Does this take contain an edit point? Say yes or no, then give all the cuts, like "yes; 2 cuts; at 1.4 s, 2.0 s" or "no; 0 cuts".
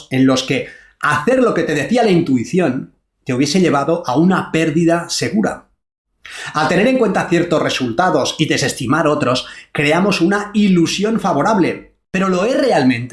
no; 0 cuts